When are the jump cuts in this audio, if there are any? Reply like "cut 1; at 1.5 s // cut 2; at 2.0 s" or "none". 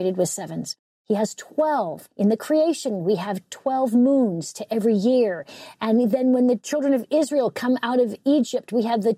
none